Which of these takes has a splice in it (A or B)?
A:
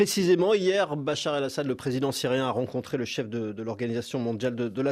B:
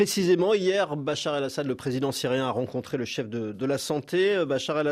B